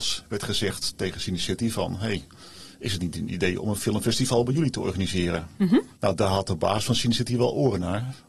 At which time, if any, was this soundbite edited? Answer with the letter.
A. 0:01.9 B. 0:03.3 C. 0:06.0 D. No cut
C